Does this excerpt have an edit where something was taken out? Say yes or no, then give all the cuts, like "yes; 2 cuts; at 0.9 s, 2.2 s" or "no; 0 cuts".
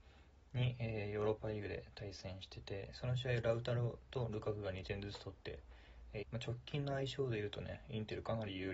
yes; 1 cut; at 6.2 s